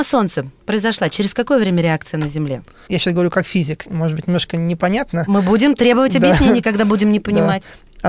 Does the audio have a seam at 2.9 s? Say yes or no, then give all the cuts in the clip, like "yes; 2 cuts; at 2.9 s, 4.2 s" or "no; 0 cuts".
yes; 1 cut; at 2.9 s